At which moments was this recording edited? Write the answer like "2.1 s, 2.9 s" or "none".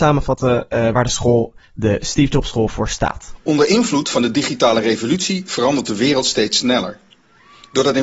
none